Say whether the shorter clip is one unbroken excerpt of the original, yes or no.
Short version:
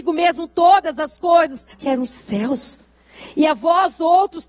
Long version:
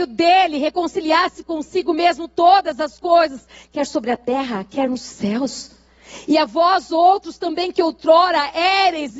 no